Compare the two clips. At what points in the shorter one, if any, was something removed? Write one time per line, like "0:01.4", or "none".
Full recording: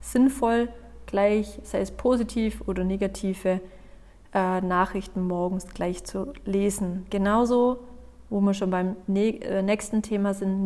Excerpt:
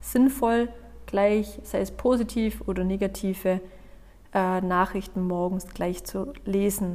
none